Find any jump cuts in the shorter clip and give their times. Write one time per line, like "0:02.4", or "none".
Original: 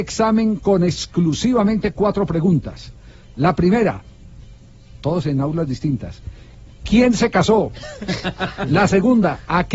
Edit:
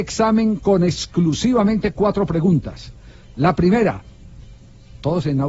none